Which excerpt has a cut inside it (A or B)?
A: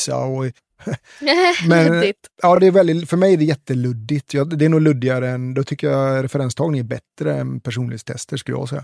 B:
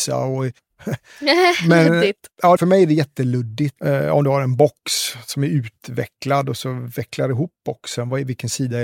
B